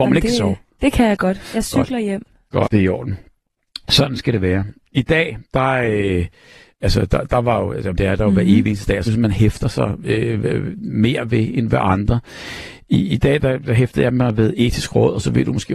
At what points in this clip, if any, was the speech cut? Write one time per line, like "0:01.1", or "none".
0:02.6
0:07.9
0:09.1